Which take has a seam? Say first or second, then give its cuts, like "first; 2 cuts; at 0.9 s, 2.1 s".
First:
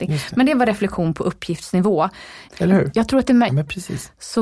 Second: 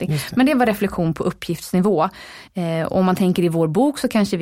first; 2 cuts; at 2.5 s, 3.5 s